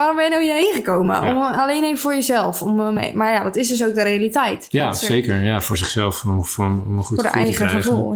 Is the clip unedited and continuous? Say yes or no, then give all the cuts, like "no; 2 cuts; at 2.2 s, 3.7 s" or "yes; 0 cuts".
yes; 0 cuts